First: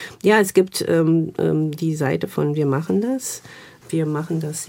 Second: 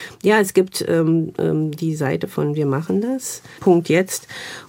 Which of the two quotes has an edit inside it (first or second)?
second